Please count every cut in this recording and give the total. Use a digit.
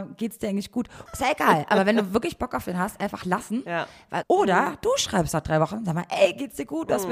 2